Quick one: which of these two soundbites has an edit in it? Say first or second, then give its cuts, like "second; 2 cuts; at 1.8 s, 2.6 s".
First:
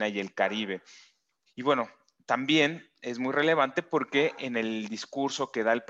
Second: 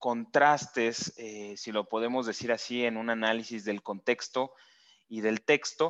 first; 1 cut; at 1.5 s